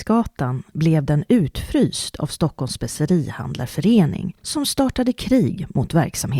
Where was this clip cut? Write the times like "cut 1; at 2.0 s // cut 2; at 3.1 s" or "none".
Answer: none